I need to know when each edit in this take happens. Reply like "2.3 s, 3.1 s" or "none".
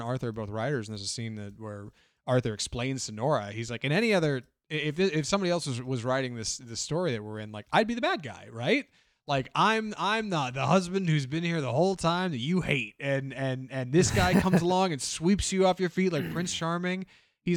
none